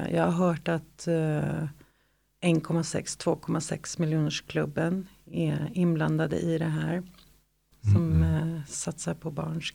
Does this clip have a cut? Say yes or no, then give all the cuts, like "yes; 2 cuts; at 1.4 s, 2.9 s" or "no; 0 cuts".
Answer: yes; 1 cut; at 7.7 s